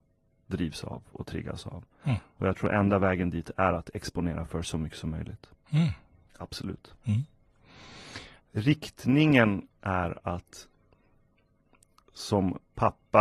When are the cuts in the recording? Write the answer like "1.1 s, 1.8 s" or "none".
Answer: 6.3 s, 8.4 s, 9.7 s